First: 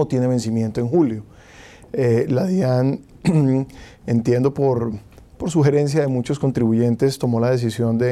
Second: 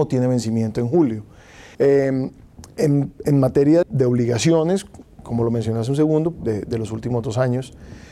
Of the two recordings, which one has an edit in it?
second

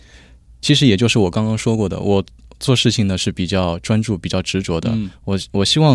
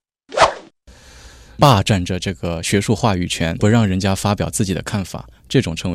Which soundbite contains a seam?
second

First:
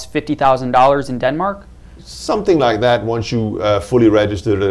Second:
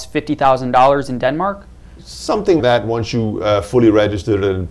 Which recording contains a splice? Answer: second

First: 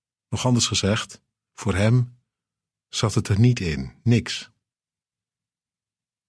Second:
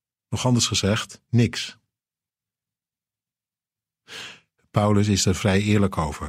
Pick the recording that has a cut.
second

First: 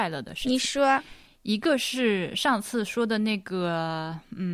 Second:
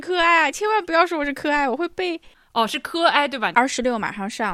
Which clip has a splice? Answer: second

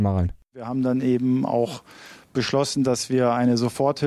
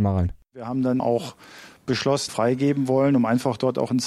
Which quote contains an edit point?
second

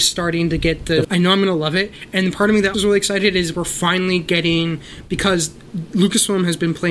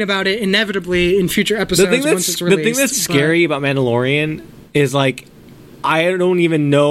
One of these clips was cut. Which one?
first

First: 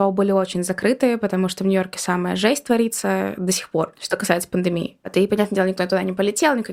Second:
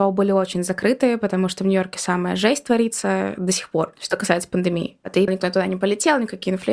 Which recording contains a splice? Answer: second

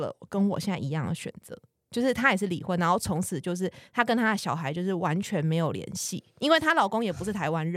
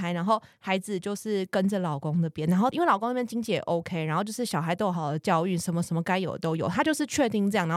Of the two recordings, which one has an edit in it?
second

